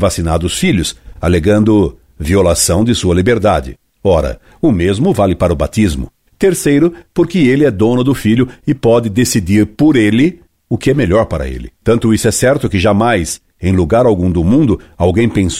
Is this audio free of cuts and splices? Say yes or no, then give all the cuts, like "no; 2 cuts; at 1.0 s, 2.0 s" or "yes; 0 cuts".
no; 1 cut; at 6.3 s